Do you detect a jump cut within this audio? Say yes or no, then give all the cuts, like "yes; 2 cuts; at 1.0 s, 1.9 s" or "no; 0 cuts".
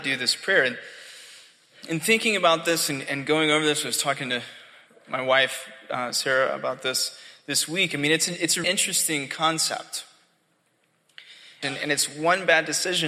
yes; 2 cuts; at 8.6 s, 11.6 s